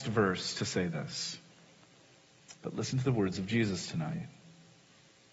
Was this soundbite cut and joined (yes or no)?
yes